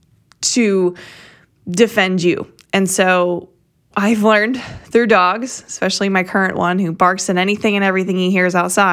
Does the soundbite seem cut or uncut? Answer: uncut